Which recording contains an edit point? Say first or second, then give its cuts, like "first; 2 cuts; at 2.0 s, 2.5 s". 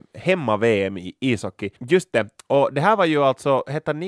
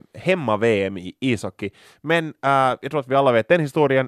first; 1 cut; at 1.8 s